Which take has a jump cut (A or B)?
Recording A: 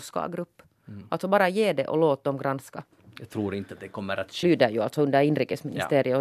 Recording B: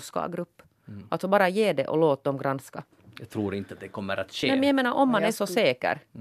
A